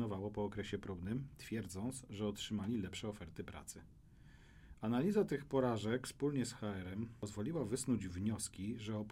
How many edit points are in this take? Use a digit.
0